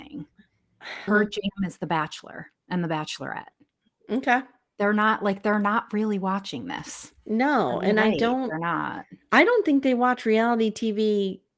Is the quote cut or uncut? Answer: cut